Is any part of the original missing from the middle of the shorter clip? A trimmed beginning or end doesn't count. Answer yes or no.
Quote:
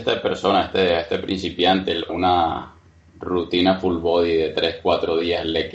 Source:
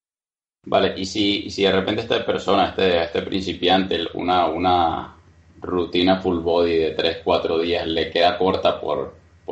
yes